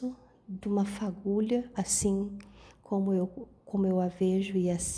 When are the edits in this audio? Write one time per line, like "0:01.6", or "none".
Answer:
none